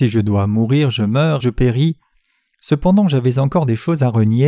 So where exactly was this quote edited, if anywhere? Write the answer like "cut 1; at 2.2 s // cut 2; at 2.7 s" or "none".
cut 1; at 1.4 s

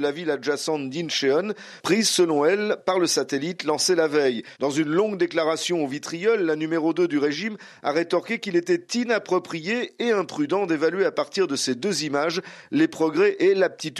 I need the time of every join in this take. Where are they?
cut 1; at 4.6 s

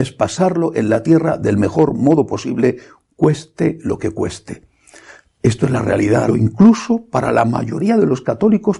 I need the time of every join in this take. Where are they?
cut 1; at 6.3 s

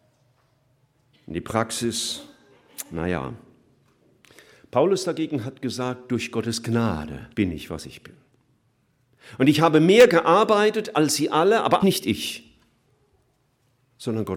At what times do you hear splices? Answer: cut 1; at 1.1 s // cut 2; at 7.3 s // cut 3; at 11.8 s

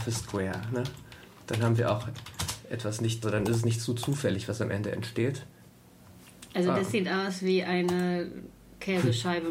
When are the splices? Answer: cut 1; at 3.2 s

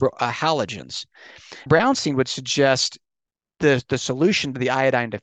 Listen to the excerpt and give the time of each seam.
cut 1; at 1.7 s

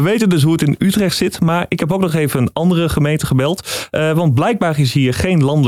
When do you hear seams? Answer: none

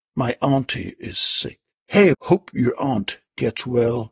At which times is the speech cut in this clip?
cut 1; at 2.1 s

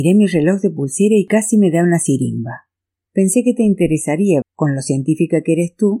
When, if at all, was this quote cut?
cut 1; at 3.1 s // cut 2; at 4.4 s

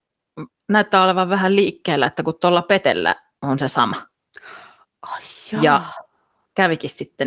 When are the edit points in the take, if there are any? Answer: none

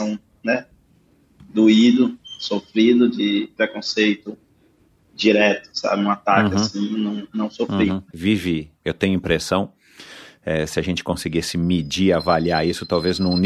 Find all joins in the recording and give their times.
cut 1; at 8.1 s

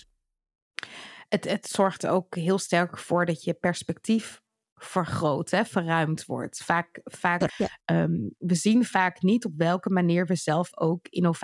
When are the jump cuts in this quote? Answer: cut 1; at 7.5 s

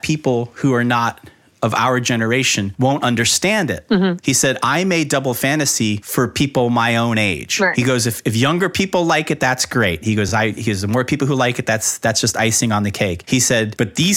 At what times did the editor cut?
none

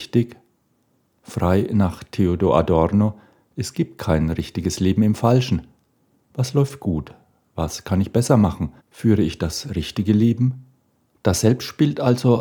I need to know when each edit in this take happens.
cut 1; at 8.8 s // cut 2; at 11.1 s

